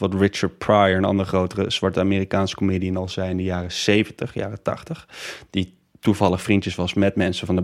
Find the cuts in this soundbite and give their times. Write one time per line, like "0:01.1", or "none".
none